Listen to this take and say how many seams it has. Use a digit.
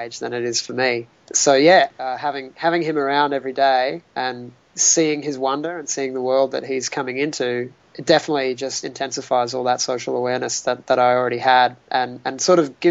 0